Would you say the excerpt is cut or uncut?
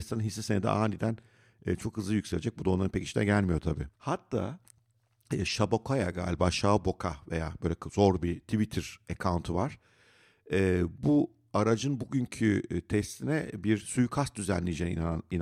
cut